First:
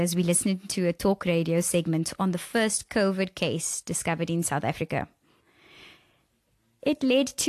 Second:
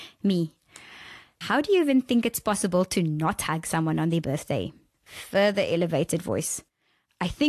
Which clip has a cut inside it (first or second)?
second